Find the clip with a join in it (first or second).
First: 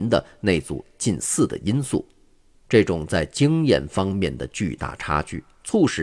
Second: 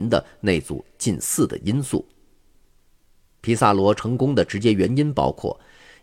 first